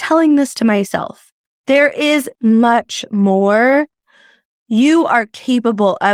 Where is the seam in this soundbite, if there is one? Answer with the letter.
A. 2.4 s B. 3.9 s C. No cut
A